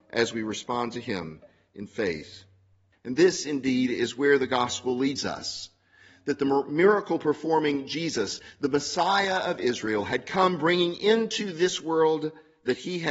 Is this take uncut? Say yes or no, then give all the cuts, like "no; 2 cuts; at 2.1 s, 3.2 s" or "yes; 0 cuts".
no; 1 cut; at 2.9 s